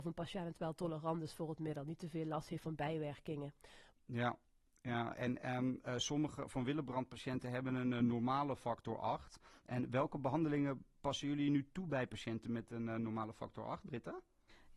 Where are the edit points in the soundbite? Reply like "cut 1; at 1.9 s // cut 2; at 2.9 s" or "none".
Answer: cut 1; at 3.9 s